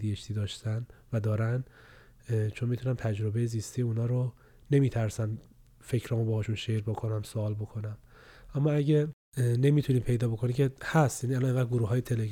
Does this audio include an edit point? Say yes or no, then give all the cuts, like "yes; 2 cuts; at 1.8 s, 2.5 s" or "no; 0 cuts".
no; 0 cuts